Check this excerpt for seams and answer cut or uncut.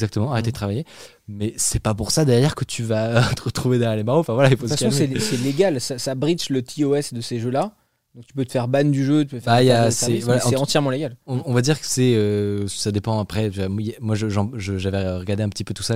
uncut